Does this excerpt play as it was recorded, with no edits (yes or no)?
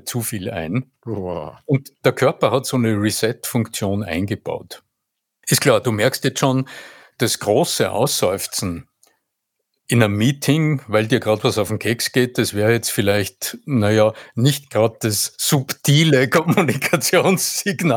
no